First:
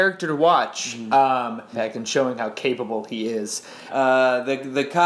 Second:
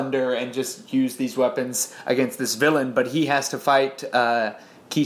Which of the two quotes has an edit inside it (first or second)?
first